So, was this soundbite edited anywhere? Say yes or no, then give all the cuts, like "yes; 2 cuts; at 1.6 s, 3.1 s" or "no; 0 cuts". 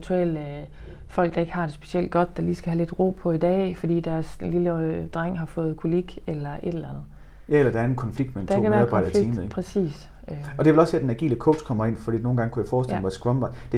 no; 0 cuts